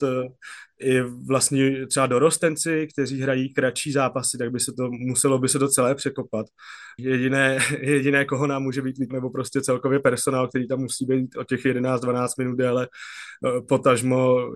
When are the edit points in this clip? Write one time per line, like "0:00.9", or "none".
0:07.0
0:09.1